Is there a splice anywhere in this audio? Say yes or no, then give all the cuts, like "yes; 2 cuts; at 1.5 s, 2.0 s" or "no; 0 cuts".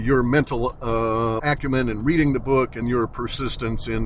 yes; 2 cuts; at 1.4 s, 2.8 s